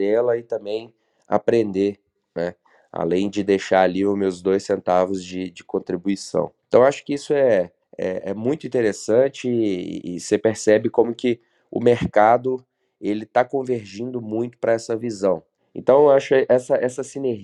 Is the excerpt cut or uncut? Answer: cut